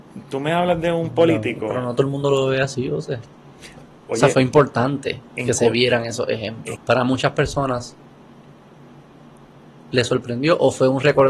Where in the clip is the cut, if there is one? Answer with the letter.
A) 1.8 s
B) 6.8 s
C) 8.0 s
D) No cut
B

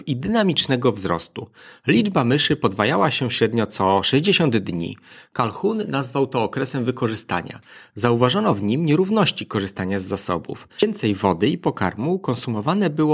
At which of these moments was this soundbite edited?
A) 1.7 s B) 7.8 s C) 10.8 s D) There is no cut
C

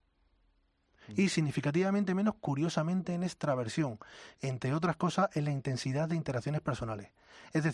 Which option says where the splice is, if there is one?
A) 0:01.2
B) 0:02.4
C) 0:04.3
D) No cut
C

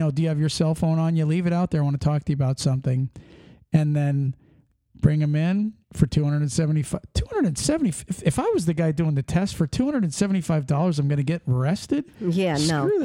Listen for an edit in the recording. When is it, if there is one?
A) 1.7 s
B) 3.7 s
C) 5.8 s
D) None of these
C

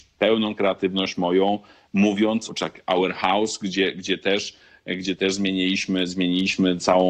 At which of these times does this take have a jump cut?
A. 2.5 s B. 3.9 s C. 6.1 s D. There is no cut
A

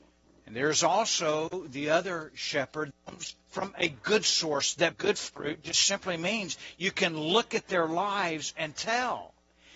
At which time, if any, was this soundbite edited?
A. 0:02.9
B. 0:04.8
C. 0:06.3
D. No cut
A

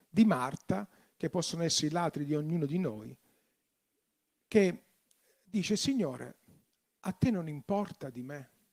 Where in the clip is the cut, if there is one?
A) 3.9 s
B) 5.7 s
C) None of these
C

